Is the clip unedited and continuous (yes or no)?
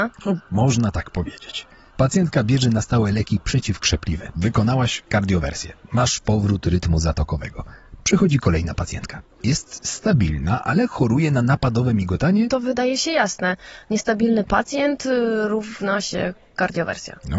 no